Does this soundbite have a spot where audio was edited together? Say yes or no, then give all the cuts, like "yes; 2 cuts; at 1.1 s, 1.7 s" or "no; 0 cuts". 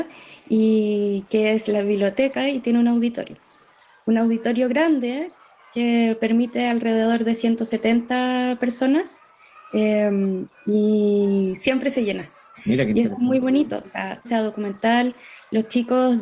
yes; 2 cuts; at 12.5 s, 14.2 s